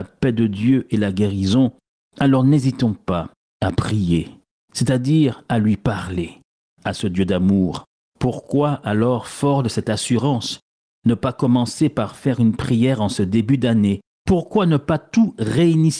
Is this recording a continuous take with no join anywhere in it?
yes; 0 cuts

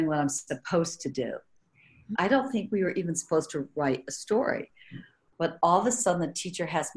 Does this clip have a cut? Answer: yes; 1 cut; at 2.1 s

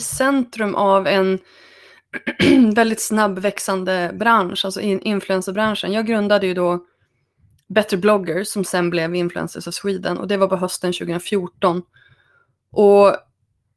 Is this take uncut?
yes; 0 cuts

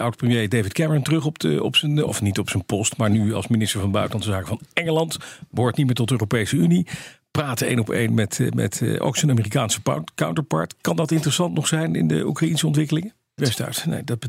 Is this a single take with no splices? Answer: no; 1 cut; at 13.4 s

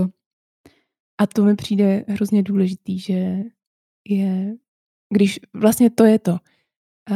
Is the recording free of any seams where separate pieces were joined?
no; 1 cut; at 1.1 s

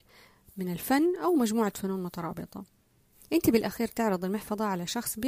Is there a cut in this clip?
no; 0 cuts

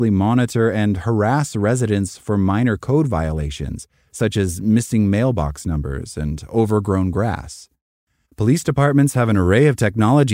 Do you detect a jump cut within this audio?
yes; 1 cut; at 8.2 s

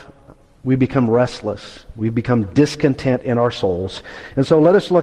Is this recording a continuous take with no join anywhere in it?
yes; 0 cuts

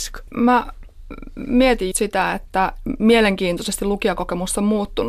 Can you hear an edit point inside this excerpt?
yes; 1 cut; at 1.9 s

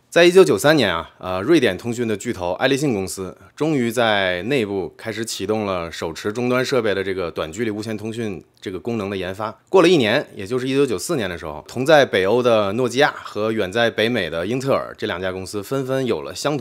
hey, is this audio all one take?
yes; 0 cuts

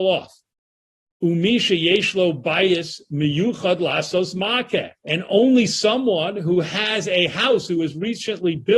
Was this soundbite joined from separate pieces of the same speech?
yes; 2 cuts; at 1.1 s, 5.0 s

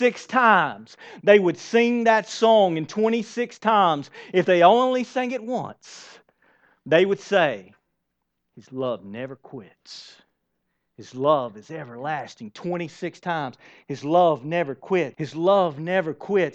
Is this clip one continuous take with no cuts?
no; 1 cut; at 15.1 s

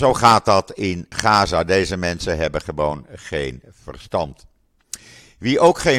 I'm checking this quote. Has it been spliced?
no; 0 cuts

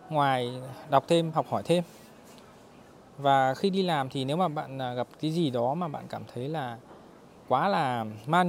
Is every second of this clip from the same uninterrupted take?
no; 1 cut; at 1.3 s

